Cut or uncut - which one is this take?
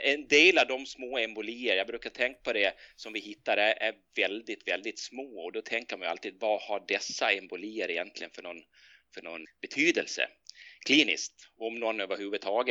cut